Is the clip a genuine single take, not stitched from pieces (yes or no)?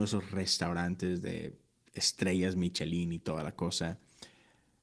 yes